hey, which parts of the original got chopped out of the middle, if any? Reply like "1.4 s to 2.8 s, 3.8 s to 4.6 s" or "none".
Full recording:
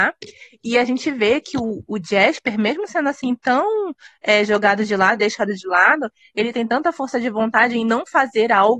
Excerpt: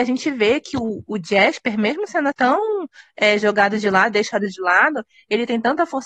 3.1 s to 3.4 s